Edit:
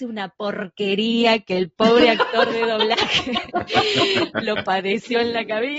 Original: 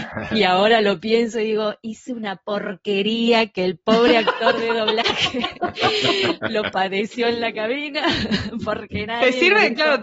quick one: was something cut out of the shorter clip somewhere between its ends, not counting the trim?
no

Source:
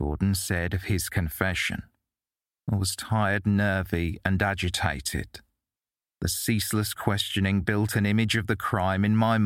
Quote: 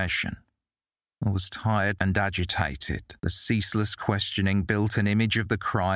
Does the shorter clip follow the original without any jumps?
no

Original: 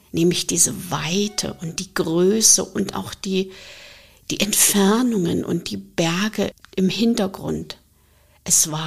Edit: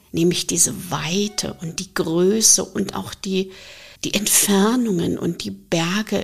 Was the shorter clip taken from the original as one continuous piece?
no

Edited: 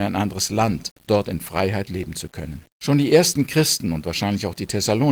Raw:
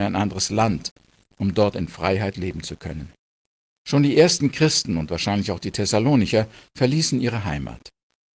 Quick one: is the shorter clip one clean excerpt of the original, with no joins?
no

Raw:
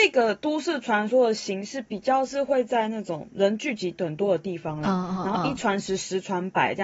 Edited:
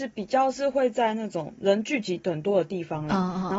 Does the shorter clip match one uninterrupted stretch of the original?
yes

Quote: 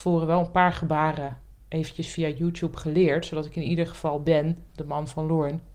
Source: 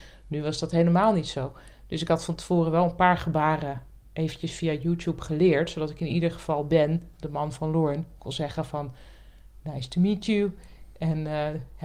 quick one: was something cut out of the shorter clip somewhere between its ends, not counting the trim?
no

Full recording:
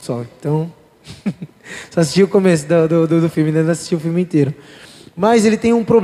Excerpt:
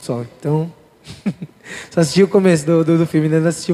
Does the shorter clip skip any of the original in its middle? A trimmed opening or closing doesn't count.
yes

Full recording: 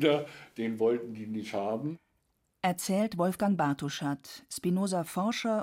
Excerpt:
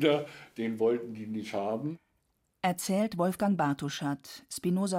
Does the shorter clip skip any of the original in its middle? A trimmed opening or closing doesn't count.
no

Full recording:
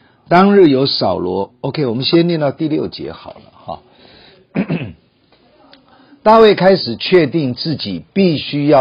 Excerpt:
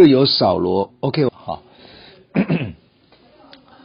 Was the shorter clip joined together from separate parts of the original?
yes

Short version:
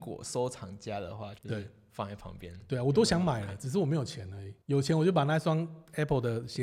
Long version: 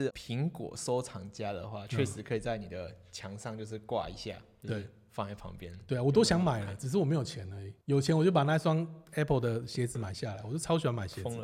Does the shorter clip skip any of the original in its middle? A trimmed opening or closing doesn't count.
yes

